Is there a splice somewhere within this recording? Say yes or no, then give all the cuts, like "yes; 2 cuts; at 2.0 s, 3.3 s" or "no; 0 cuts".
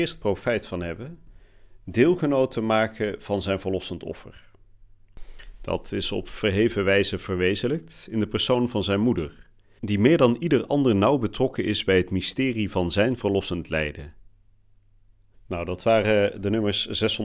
yes; 2 cuts; at 9.8 s, 15.3 s